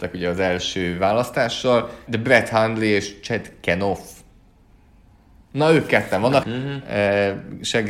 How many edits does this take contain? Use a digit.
2